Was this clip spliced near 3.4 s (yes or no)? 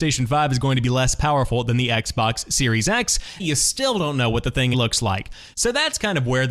yes